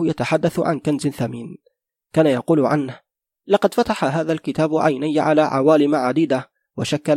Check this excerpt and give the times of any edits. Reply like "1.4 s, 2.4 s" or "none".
none